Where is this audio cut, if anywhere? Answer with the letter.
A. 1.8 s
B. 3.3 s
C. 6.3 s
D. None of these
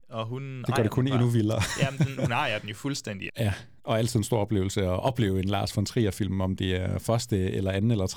B